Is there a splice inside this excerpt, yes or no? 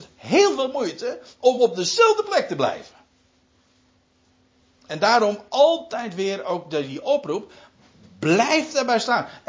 no